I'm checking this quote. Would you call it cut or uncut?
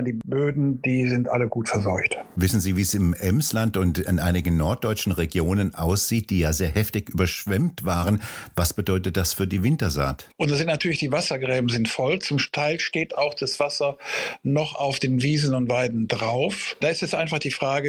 cut